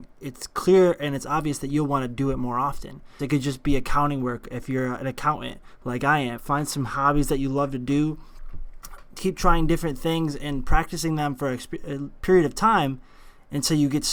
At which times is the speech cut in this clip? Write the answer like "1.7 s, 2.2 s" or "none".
3.2 s, 6.4 s